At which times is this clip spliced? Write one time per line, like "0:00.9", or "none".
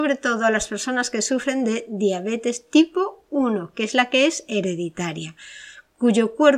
none